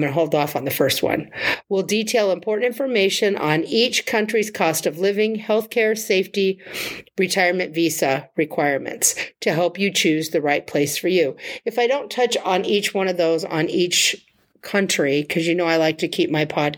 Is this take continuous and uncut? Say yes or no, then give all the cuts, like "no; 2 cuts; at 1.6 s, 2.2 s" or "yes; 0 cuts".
no; 1 cut; at 1.6 s